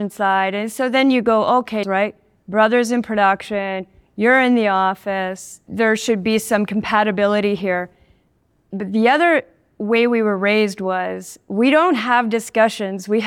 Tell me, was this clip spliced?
yes; 1 cut; at 1.8 s

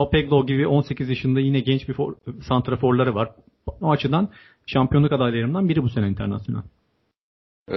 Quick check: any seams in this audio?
yes; 1 cut; at 3.8 s

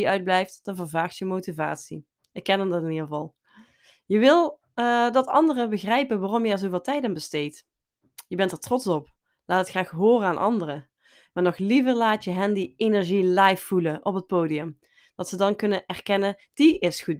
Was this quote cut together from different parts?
no; 0 cuts

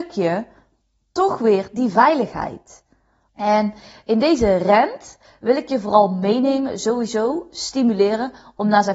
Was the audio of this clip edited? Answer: yes; 1 cut; at 3.3 s

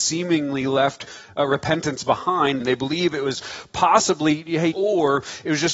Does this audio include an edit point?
yes; 2 cuts; at 2.6 s, 4.7 s

